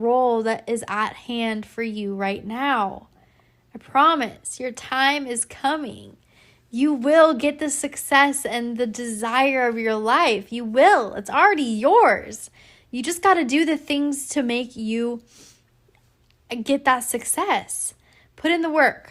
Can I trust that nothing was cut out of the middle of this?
yes; 0 cuts

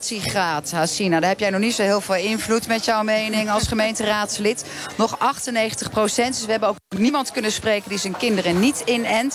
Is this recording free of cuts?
yes; 0 cuts

